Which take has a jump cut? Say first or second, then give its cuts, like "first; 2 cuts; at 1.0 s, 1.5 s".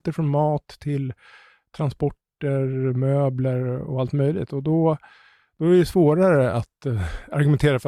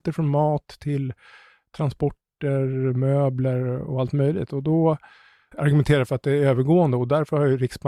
second; 1 cut; at 5.5 s